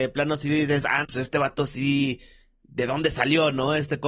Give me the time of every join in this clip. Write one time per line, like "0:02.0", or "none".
0:01.0